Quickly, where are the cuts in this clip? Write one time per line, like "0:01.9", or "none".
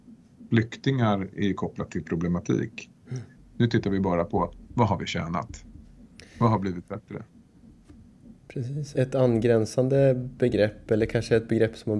0:03.4
0:08.9